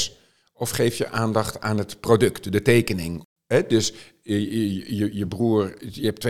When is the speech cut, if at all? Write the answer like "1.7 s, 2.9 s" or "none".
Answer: 5.1 s